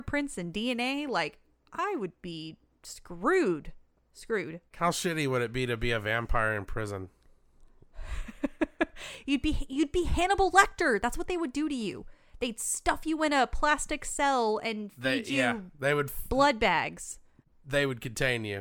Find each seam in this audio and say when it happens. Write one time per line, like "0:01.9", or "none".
none

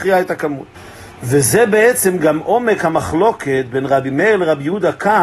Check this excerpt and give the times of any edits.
none

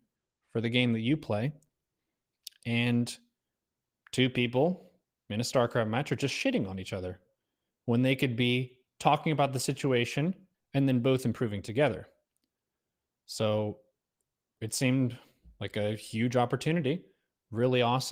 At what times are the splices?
0:10.5

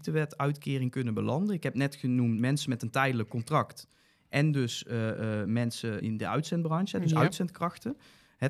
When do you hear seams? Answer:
0:06.0

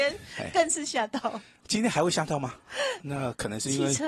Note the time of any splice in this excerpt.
0:03.0

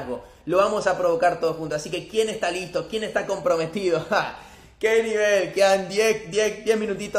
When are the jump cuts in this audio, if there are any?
none

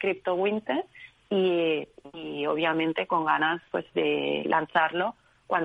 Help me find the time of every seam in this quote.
0:03.9

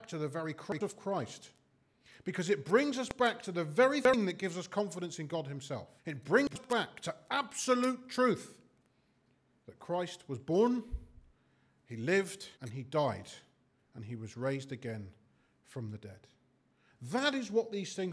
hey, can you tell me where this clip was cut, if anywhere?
0:06.0
0:12.6

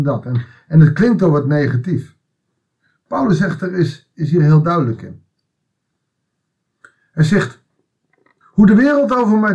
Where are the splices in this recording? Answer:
none

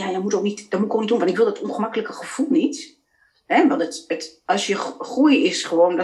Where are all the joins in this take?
none

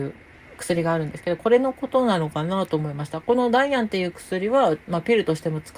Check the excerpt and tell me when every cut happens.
none

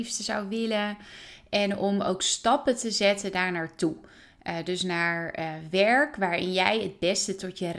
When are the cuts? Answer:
none

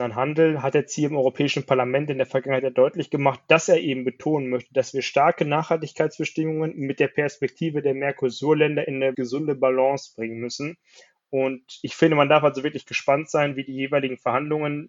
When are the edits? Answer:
0:09.1

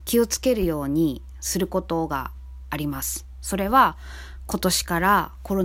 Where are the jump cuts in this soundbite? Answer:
none

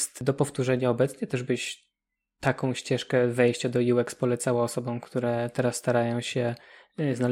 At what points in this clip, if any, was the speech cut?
none

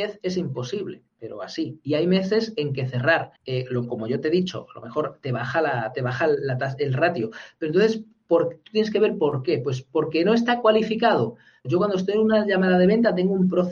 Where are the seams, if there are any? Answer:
0:03.4
0:11.6

